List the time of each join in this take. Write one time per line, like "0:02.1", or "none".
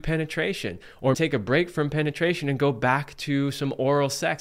0:01.1